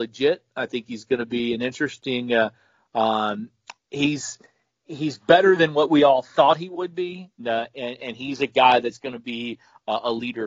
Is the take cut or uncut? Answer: cut